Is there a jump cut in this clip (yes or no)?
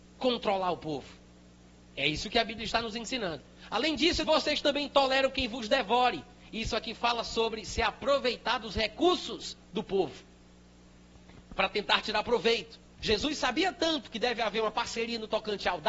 yes